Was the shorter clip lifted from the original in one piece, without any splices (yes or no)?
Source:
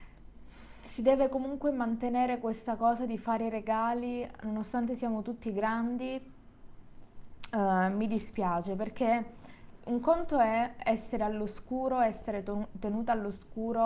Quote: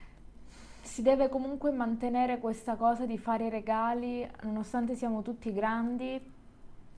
yes